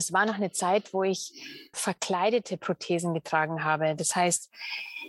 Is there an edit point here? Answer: yes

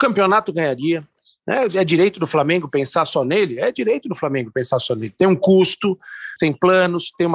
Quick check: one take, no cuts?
no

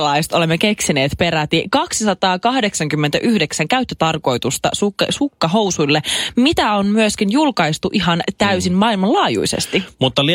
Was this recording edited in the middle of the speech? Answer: no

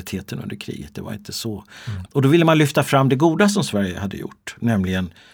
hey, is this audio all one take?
no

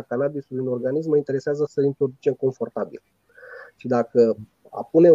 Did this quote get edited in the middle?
yes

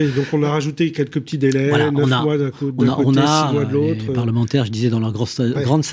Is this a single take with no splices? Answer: yes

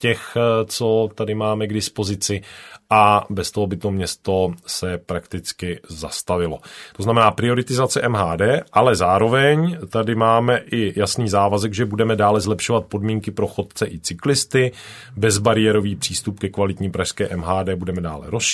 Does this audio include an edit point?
no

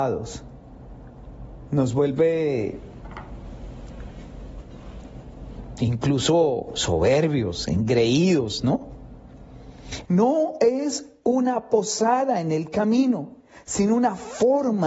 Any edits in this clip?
yes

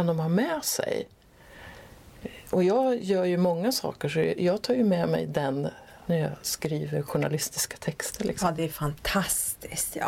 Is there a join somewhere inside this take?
no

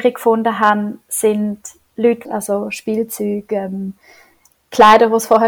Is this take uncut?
no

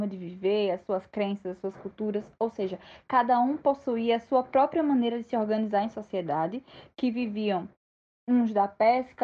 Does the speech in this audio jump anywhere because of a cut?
no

